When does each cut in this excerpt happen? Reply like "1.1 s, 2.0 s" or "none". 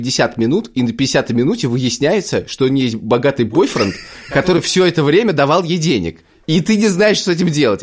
none